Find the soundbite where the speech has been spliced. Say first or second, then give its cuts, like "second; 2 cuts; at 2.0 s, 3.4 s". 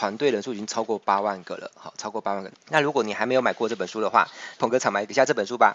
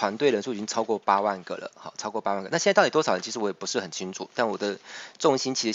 first; 2 cuts; at 2.5 s, 4.6 s